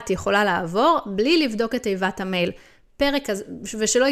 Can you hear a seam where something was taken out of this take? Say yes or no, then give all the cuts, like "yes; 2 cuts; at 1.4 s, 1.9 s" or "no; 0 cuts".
no; 0 cuts